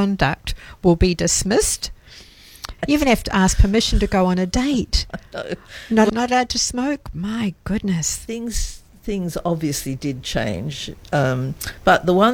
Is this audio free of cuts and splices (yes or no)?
no